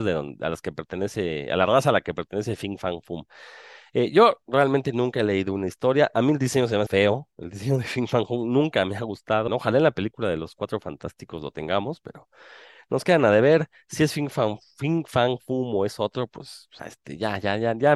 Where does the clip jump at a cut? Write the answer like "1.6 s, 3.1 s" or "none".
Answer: 6.9 s, 9.5 s, 16.8 s